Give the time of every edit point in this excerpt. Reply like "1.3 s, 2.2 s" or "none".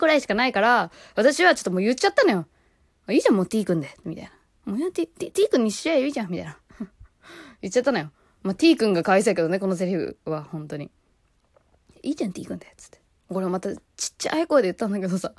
none